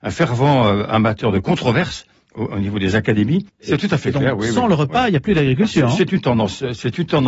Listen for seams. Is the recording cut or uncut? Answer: cut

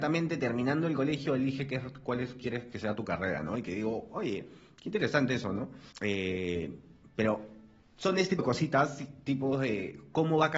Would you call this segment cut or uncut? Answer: cut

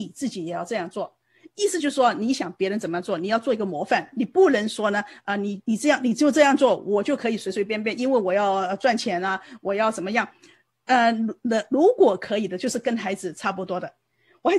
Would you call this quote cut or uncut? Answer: uncut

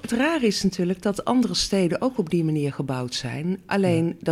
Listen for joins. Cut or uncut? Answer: uncut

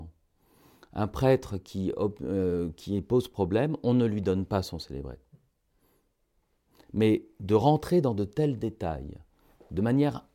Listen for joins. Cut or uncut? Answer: uncut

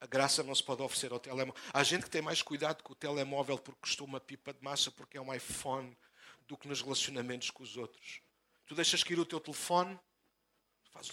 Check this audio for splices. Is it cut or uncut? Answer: uncut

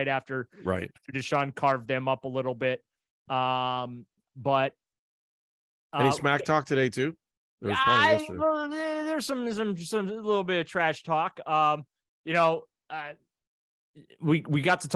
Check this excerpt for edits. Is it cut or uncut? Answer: uncut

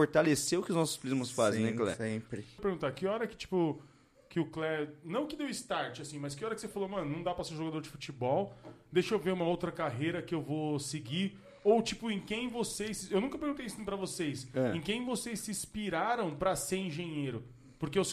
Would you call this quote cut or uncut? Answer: uncut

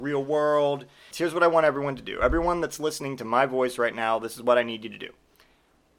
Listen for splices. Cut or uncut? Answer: cut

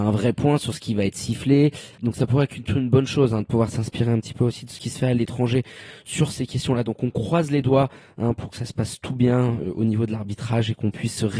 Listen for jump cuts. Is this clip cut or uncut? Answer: cut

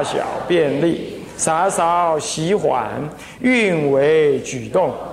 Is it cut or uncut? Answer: uncut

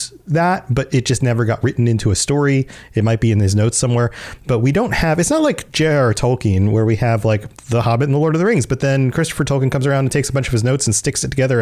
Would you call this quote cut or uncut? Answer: uncut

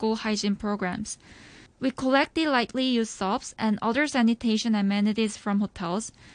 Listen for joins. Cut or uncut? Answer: cut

